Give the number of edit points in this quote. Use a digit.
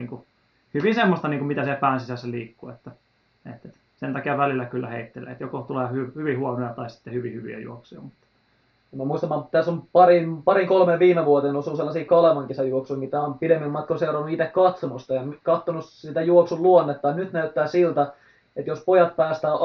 0